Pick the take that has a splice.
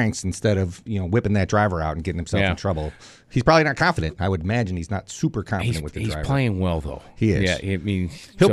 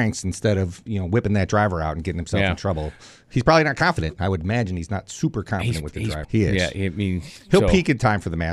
second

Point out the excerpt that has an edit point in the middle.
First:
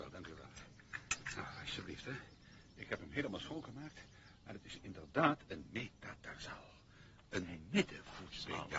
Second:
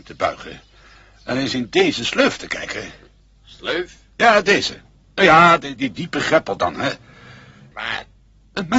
second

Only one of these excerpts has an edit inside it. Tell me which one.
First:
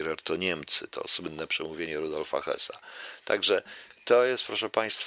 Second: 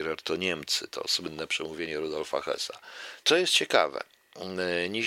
second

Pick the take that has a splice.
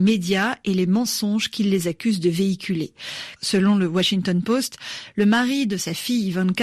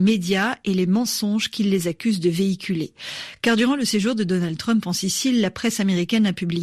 first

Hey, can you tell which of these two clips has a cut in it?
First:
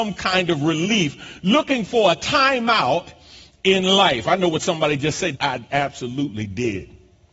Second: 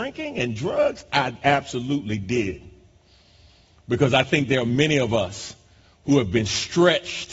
first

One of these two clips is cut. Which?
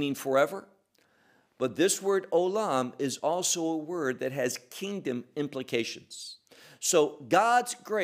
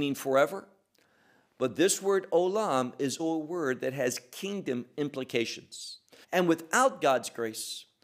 second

